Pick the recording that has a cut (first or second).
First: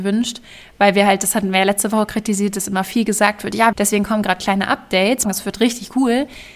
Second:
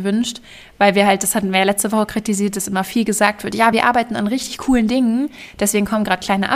first